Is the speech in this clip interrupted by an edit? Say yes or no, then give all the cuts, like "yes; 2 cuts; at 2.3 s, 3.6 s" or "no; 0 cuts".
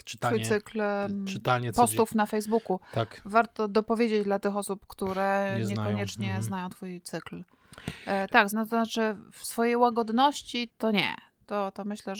yes; 2 cuts; at 8.5 s, 10.7 s